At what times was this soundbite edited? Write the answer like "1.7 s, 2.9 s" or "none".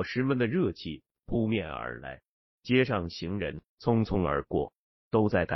3.7 s